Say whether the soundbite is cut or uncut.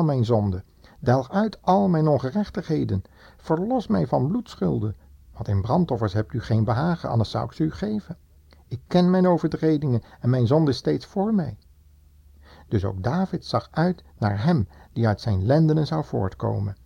uncut